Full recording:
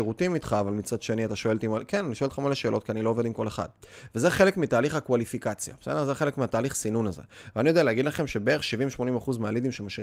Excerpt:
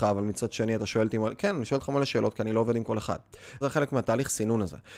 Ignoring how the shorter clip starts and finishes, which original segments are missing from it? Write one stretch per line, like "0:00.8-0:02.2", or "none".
0:04.1-0:06.1

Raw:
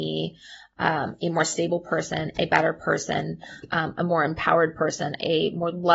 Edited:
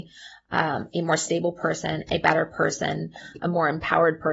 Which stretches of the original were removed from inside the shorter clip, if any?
0:03.7-0:03.9

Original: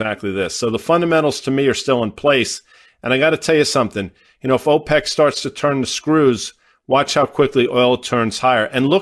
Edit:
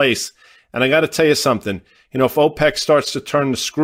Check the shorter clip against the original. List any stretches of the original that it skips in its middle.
none

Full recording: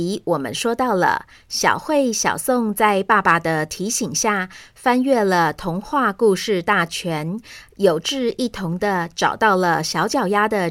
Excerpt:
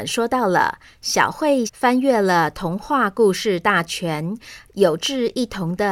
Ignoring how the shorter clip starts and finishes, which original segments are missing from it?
0:02.1-0:04.7

